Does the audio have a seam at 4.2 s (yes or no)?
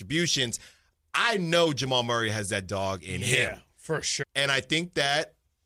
yes